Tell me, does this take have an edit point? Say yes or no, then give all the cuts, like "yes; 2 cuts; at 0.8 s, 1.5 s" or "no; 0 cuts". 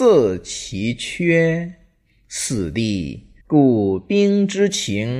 yes; 1 cut; at 3.4 s